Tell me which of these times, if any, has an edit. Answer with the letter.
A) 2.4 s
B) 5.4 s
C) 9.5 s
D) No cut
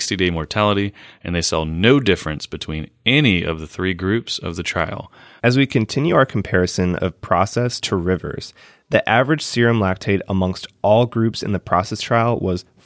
B